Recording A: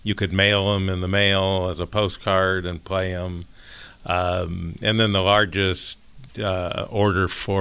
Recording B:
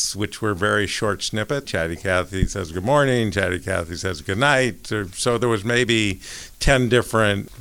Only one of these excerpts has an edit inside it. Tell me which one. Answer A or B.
B